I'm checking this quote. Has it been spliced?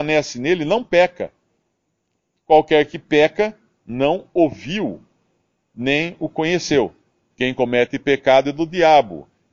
yes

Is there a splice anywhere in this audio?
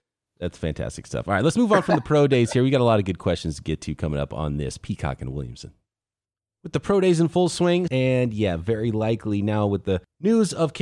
yes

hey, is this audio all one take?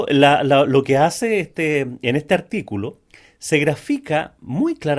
yes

